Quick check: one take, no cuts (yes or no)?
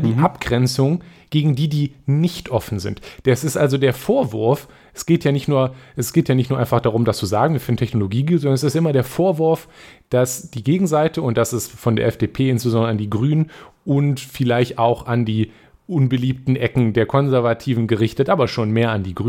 yes